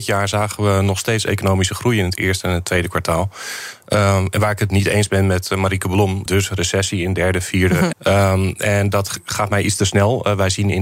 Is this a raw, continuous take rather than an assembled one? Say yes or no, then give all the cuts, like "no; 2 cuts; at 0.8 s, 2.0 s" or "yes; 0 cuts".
no; 2 cuts; at 6.3 s, 7.9 s